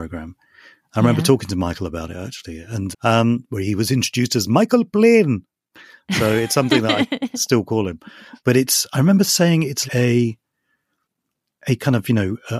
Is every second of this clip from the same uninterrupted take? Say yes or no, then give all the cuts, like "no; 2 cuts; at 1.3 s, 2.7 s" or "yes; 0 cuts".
no; 3 cuts; at 2.9 s, 8.4 s, 9.9 s